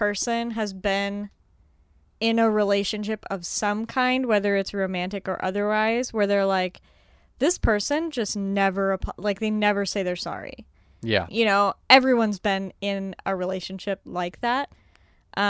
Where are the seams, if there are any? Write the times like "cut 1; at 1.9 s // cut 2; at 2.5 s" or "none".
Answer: cut 1; at 11.3 s